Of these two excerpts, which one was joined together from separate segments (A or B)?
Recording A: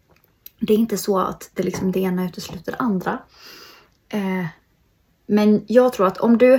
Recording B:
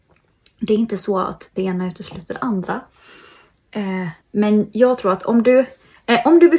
B